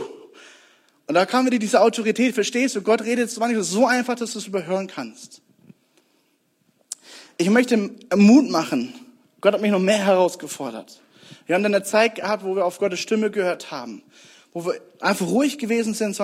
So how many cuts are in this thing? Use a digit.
0